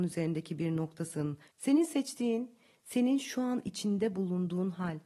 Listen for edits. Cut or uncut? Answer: cut